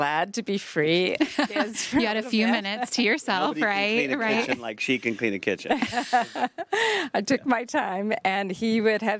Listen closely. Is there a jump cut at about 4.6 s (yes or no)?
no